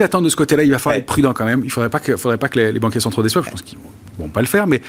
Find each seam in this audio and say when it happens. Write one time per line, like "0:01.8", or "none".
none